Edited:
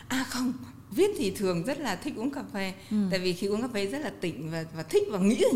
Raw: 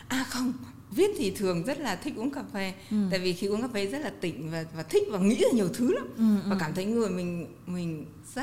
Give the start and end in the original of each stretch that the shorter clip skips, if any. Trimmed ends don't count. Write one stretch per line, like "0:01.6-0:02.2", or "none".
none

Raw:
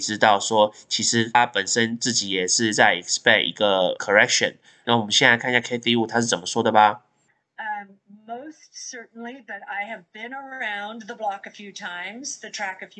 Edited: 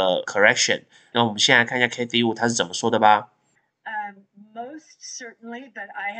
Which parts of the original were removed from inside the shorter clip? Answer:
none

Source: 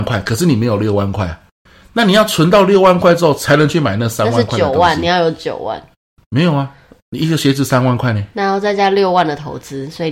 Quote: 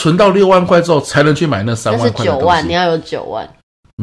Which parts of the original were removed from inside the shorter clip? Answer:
none

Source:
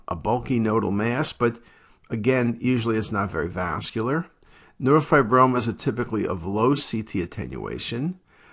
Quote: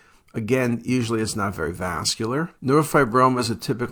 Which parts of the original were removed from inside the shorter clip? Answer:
0:04.3-0:04.7

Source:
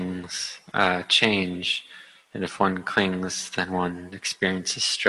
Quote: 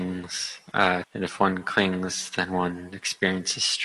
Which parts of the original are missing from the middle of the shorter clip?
0:01.0-0:02.2

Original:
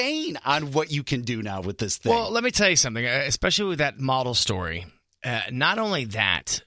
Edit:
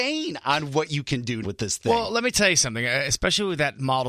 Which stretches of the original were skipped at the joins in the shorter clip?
0:01.4-0:01.6

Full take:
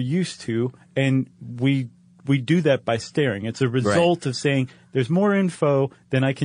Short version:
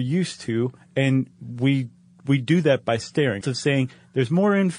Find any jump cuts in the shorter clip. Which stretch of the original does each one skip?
0:03.4-0:04.2

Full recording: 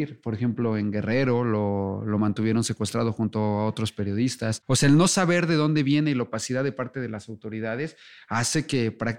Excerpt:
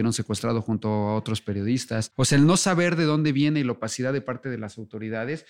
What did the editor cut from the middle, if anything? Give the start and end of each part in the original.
none

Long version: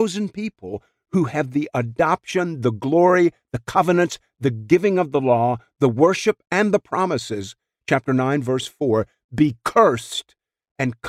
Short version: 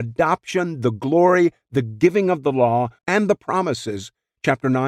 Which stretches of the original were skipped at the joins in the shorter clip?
0:03.4-0:04.3
0:05.7-0:06.4

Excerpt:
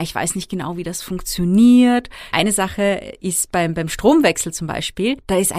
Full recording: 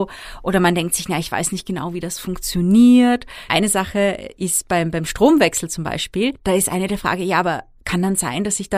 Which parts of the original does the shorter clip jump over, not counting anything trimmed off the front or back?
none

